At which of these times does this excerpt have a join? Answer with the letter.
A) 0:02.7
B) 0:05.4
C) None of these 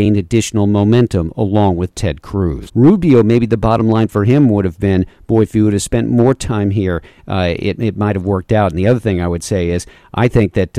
A